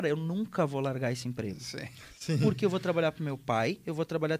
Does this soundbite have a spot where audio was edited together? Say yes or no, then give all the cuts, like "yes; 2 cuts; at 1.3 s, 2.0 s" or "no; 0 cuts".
no; 0 cuts